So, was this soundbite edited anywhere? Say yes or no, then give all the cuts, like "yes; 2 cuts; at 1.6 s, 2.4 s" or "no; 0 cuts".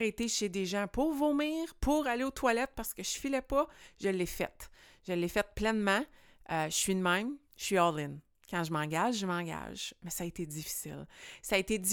no; 0 cuts